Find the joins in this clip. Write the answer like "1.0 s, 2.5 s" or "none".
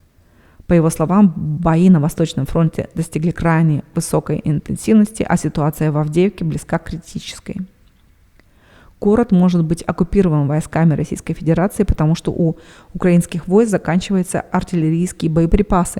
none